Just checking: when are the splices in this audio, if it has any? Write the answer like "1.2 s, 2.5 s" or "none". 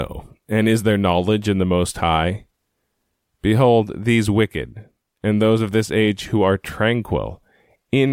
none